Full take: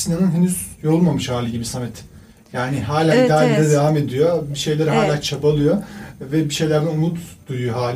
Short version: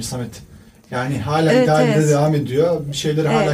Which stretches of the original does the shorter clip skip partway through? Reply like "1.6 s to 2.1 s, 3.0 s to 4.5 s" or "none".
none